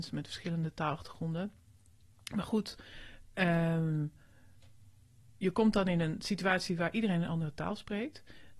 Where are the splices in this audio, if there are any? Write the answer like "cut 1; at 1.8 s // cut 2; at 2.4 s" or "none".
none

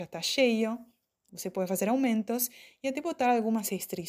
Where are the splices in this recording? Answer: cut 1; at 1.3 s

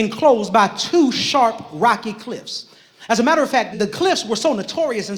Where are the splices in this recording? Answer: cut 1; at 3.7 s

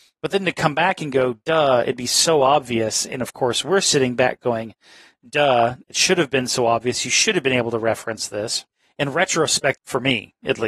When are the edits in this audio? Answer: cut 1; at 9.8 s

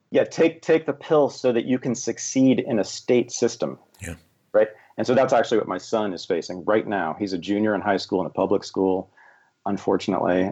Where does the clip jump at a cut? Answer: none

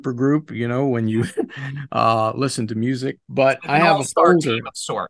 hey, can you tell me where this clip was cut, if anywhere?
cut 1; at 3.2 s

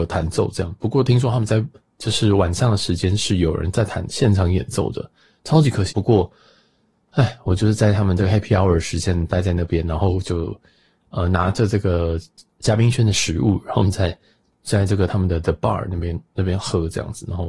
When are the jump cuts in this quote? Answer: cut 1; at 5.9 s

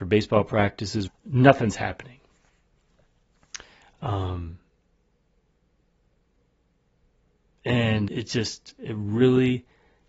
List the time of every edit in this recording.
cut 1; at 1.1 s // cut 2; at 8.1 s

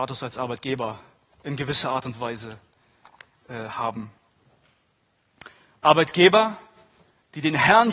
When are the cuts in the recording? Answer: none

